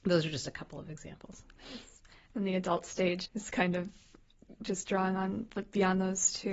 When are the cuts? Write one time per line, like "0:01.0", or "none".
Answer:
0:03.2